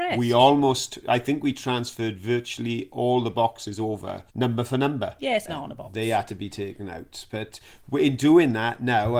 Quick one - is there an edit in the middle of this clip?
yes; 2 cuts; at 4.3 s, 5.5 s

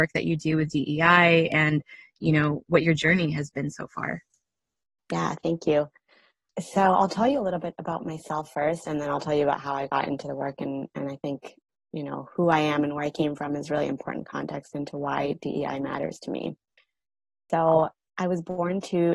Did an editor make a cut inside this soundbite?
no; 0 cuts

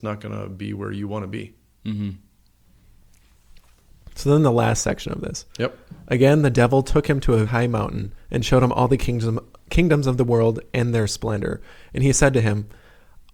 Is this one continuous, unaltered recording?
no; 1 cut; at 7.5 s

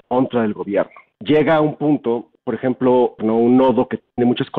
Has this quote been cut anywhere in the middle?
yes; 2 cuts; at 1.1 s, 3.2 s

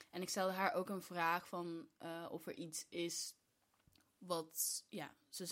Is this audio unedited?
yes; 0 cuts

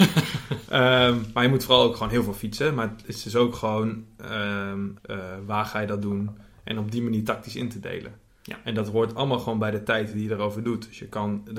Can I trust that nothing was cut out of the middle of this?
no; 1 cut; at 5.0 s

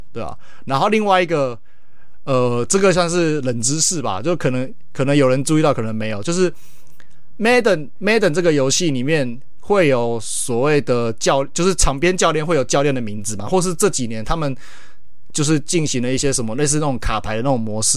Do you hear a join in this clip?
no; 0 cuts

